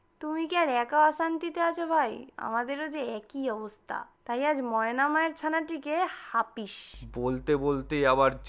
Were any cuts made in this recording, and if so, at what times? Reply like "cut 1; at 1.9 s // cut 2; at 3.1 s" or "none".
cut 1; at 4.1 s